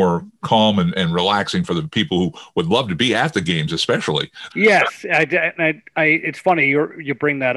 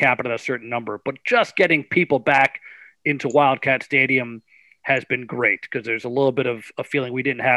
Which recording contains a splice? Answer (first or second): first